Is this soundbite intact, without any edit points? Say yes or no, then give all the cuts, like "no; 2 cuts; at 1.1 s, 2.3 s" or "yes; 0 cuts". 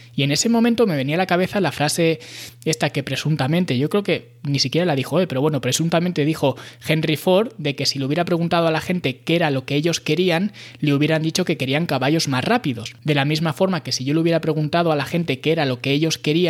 yes; 0 cuts